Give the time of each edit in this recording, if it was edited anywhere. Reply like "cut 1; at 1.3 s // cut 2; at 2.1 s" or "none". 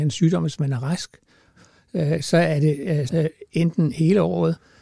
cut 1; at 3.1 s